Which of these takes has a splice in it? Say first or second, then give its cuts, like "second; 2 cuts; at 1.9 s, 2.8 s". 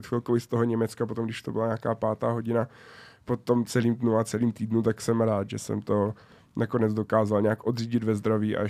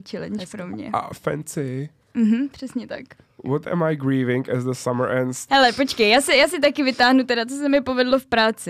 second; 1 cut; at 5.5 s